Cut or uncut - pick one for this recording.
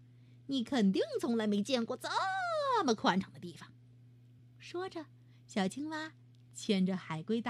uncut